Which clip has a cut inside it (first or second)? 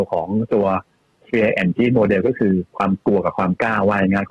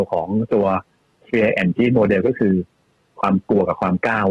first